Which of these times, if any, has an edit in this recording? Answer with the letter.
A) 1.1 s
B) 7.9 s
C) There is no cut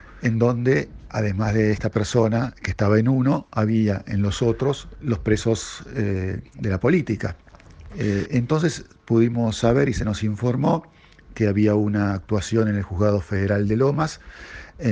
B